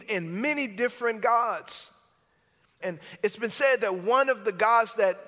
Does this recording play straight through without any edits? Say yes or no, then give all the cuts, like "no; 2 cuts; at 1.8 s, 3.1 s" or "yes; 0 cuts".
no; 1 cut; at 2.8 s